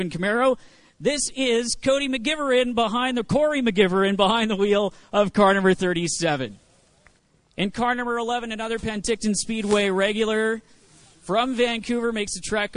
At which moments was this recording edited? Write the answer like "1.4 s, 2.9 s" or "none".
none